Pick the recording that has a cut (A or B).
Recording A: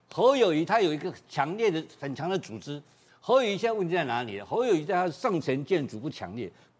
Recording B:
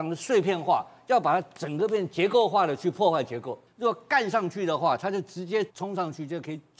B